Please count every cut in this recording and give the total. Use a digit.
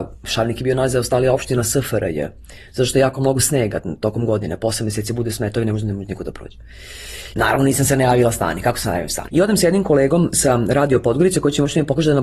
2